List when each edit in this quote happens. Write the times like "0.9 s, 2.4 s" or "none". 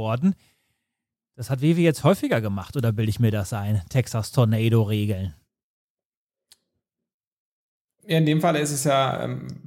none